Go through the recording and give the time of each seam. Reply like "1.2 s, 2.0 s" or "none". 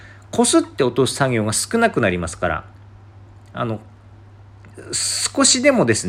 none